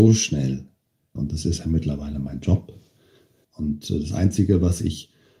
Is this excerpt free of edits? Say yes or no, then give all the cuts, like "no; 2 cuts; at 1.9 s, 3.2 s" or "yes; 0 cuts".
no; 2 cuts; at 1.2 s, 3.4 s